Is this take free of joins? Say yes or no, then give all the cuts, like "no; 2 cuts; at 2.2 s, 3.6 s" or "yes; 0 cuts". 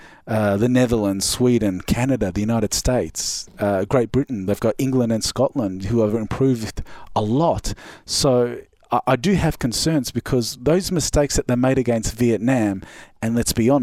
yes; 0 cuts